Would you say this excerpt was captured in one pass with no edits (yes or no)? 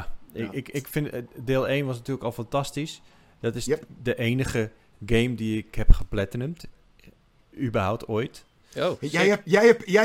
yes